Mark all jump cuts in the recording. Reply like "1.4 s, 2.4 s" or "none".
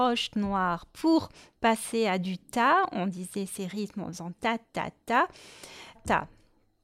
5.9 s